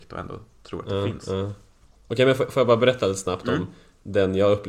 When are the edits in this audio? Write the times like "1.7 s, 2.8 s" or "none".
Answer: none

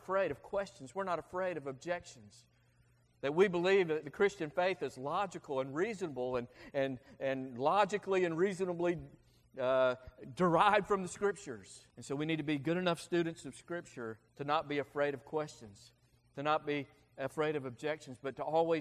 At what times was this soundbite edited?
11.9 s, 14.3 s

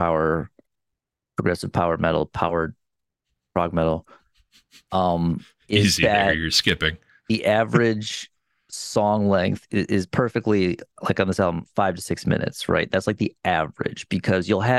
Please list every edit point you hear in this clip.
none

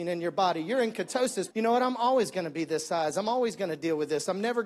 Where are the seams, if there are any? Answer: 1.5 s

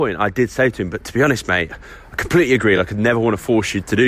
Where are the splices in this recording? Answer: none

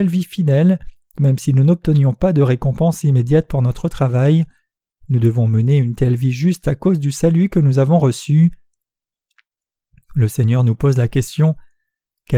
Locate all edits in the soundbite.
none

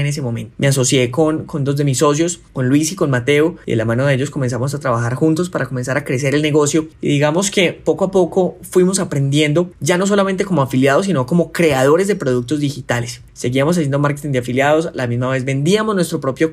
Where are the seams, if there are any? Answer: none

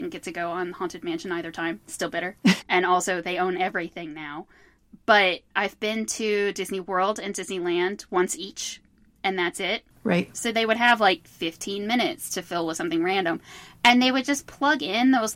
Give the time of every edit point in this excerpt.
2.6 s, 10.3 s

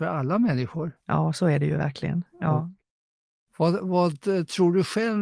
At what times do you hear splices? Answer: none

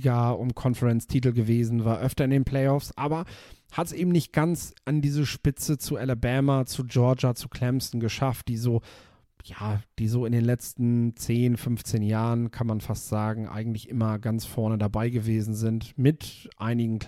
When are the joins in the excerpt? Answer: none

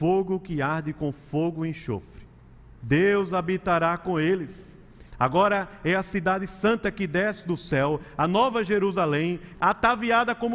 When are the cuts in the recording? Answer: 2.8 s, 5.1 s, 9.5 s

